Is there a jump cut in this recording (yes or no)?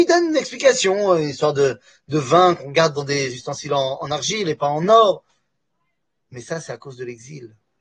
no